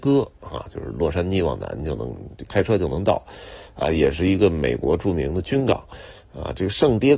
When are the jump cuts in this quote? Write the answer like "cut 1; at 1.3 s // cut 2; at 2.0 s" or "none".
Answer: cut 1; at 2.5 s

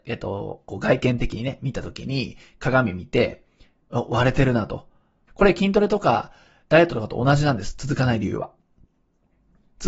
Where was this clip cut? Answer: cut 1; at 5.3 s

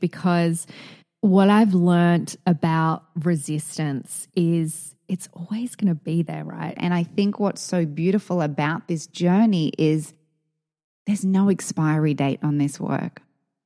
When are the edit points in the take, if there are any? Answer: cut 1; at 6.8 s

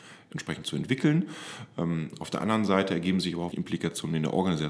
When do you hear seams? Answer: cut 1; at 3.5 s

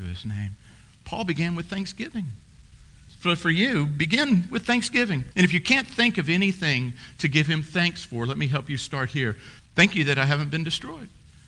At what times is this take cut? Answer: cut 1; at 5.3 s // cut 2; at 9.6 s

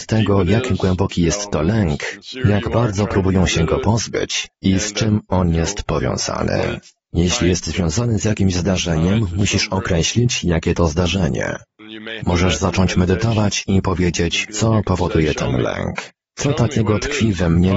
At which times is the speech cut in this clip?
cut 1; at 12.2 s // cut 2; at 14.5 s

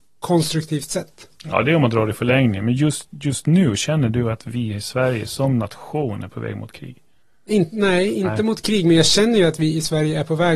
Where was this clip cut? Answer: none

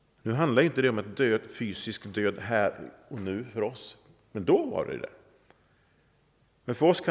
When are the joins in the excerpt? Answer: none

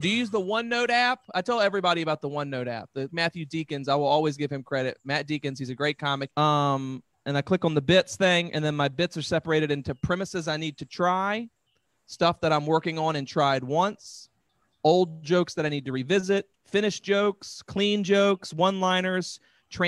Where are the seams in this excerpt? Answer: cut 1; at 3.1 s // cut 2; at 6.3 s // cut 3; at 16.5 s

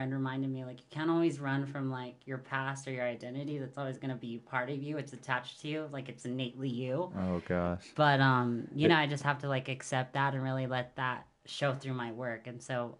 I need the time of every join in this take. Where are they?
none

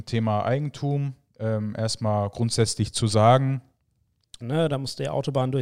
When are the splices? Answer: cut 1; at 4.4 s

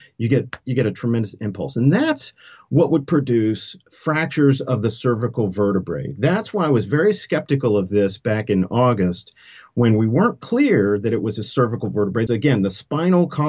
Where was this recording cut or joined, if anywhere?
cut 1; at 12.3 s

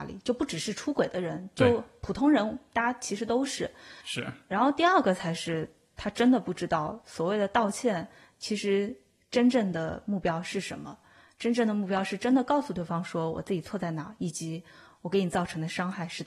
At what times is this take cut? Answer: cut 1; at 4.0 s

